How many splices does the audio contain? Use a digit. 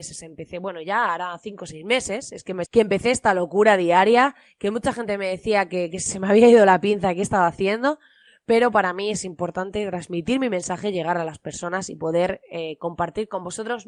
1